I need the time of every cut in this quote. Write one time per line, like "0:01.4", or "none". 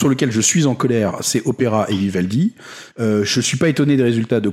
0:02.9